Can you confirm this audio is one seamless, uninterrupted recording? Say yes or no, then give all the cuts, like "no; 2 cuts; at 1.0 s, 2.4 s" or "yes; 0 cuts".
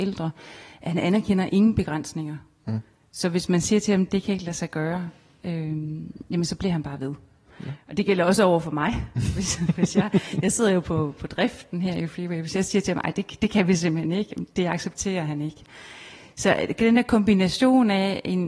yes; 0 cuts